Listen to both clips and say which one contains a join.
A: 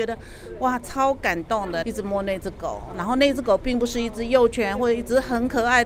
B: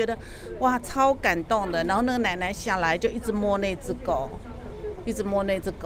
A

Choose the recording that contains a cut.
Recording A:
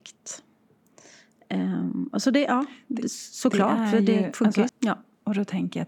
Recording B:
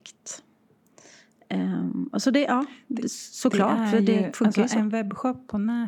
A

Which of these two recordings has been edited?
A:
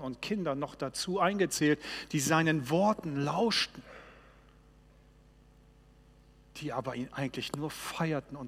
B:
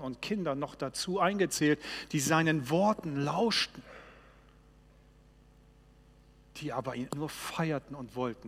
B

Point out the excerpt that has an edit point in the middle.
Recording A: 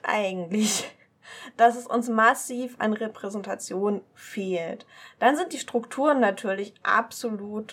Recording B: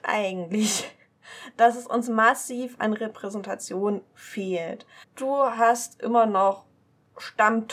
B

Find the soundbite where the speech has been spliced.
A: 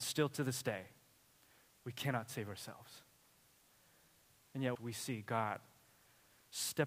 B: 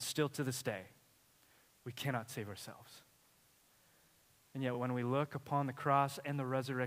A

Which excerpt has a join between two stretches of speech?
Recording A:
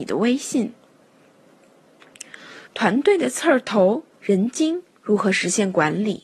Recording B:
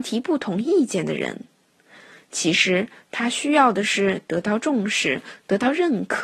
A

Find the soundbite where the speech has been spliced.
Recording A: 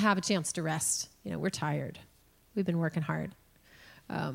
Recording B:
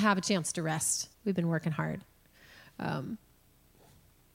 B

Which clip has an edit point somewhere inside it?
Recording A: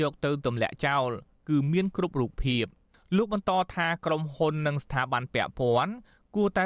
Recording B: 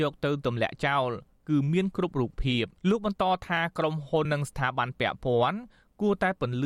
B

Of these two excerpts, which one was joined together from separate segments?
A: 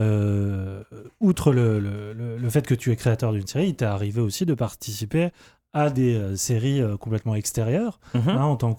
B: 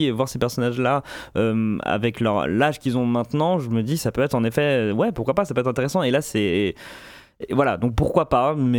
B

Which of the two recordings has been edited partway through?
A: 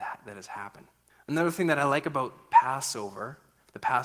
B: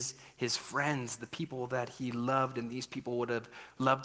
A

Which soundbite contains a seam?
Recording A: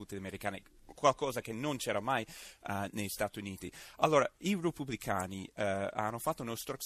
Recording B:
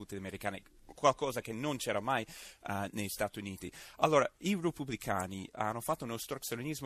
B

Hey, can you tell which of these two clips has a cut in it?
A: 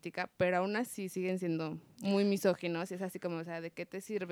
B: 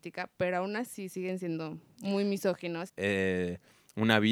B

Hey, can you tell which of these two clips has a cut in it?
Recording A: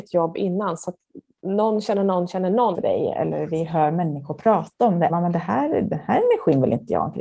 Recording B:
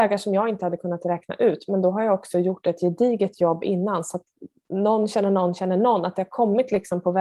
A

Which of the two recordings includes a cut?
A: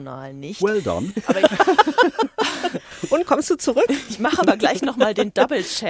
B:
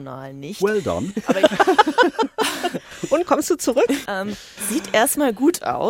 B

